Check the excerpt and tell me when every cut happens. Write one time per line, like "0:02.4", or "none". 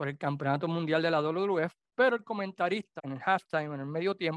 0:03.0